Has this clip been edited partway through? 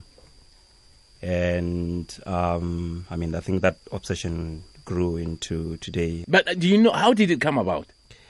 yes; 1 cut; at 6.2 s

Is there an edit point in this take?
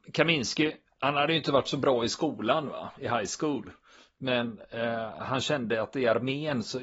no; 0 cuts

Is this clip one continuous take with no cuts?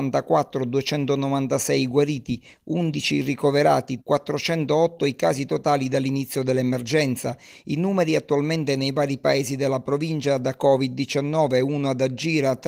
no; 1 cut; at 4.0 s

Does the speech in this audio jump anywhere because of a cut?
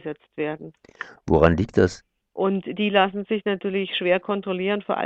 yes; 1 cut; at 2.3 s

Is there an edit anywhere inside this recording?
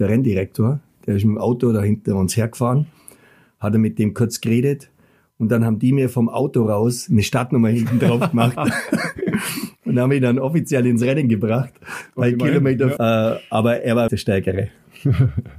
yes; 2 cuts; at 13.0 s, 14.1 s

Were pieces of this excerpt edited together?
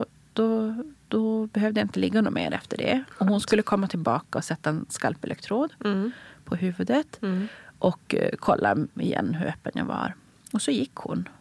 no; 0 cuts

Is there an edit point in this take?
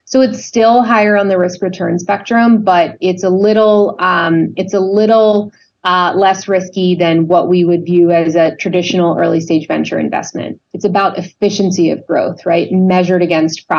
yes; 1 cut; at 10.7 s

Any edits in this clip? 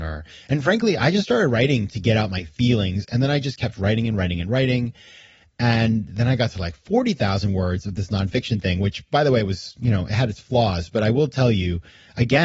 no; 0 cuts

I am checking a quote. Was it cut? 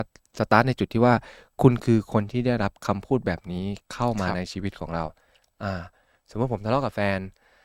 no; 0 cuts

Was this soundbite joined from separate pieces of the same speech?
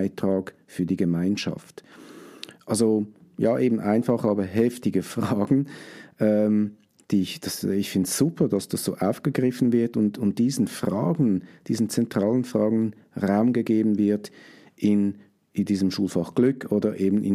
no; 0 cuts

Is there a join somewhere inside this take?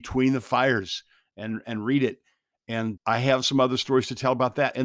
yes; 1 cut; at 3.0 s

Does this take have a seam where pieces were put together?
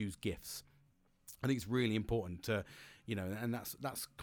no; 0 cuts

